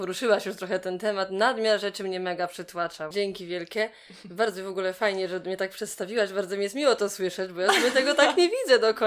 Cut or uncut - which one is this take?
cut